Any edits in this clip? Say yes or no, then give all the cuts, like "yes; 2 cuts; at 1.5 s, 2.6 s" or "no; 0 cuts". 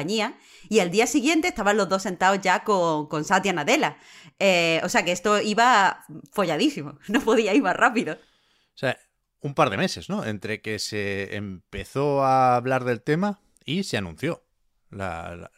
no; 0 cuts